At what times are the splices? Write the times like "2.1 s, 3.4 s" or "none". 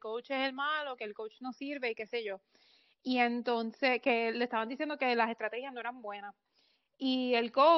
none